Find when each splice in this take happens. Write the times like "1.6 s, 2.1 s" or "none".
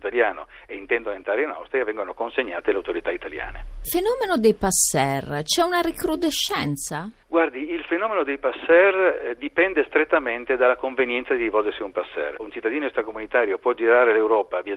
12.4 s